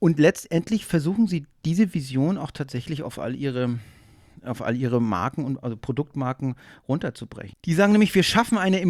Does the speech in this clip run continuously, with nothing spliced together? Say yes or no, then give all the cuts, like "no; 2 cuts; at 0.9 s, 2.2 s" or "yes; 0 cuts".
no; 1 cut; at 7.5 s